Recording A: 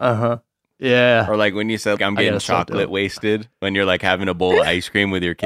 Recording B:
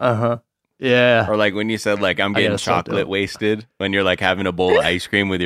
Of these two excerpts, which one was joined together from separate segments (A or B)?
A